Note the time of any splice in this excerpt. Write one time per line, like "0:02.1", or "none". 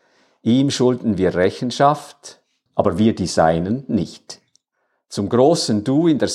0:02.7